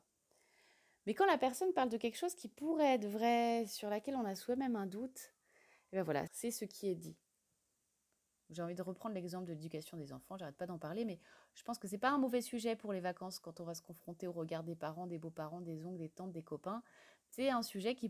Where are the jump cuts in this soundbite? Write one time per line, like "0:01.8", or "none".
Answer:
0:06.3